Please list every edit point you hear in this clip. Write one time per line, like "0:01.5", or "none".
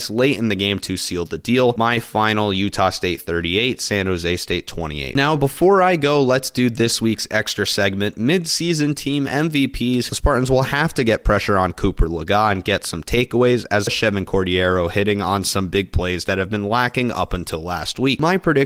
0:10.1
0:13.9